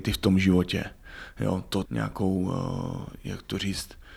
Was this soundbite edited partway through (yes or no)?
yes